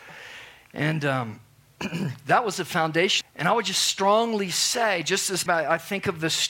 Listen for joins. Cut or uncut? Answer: cut